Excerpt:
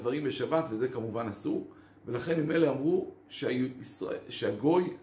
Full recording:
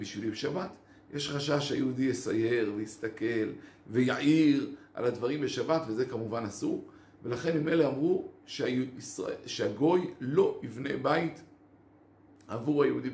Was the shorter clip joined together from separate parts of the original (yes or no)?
no